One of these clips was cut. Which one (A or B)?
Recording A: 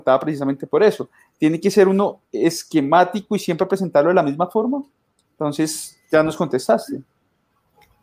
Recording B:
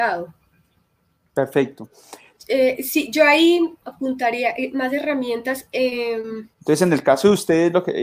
B